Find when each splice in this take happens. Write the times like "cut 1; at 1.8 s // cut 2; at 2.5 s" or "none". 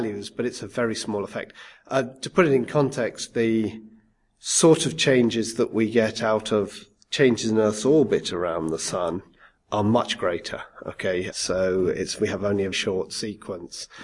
cut 1; at 11.3 s // cut 2; at 12.7 s